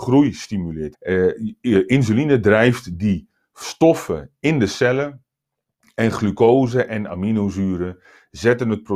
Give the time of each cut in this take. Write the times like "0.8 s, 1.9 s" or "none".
0.9 s